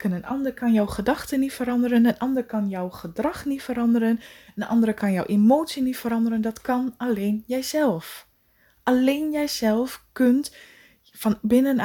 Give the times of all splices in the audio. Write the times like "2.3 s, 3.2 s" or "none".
none